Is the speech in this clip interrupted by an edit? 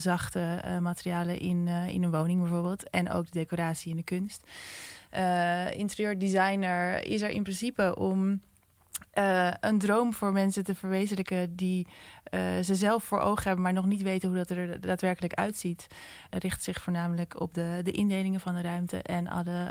yes; 1 cut; at 16.3 s

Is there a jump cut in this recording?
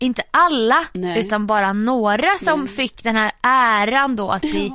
no; 0 cuts

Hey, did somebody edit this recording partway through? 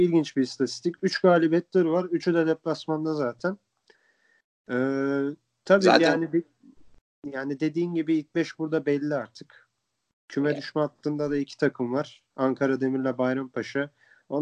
no; 0 cuts

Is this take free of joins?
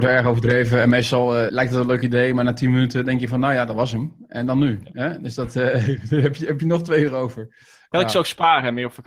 no; 1 cut; at 1.5 s

